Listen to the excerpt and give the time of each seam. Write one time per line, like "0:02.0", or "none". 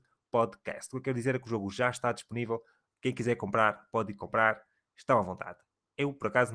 none